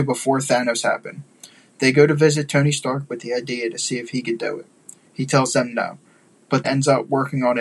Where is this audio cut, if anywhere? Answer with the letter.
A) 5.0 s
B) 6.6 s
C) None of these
B